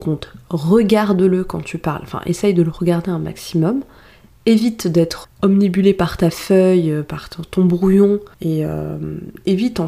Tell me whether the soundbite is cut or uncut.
cut